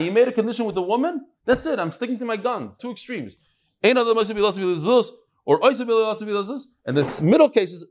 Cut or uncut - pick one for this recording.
cut